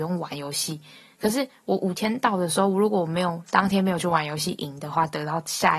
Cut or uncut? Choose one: uncut